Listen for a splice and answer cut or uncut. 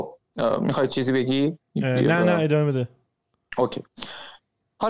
uncut